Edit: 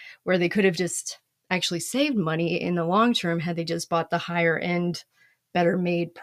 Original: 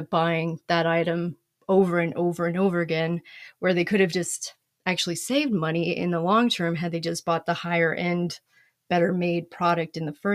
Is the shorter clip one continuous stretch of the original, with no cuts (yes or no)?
yes